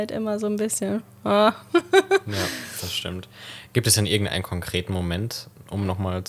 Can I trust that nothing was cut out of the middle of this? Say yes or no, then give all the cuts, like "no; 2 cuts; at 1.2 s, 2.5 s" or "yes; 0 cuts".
yes; 0 cuts